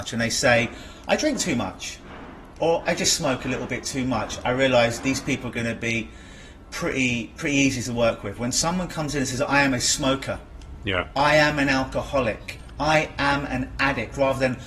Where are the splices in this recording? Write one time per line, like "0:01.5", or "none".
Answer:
0:02.9

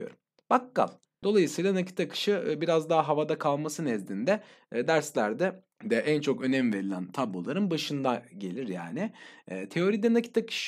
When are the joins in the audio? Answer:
0:01.2
0:05.7

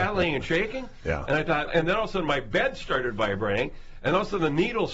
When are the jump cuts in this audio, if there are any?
0:01.7

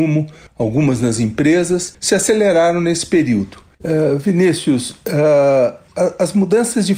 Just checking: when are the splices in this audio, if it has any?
0:03.8

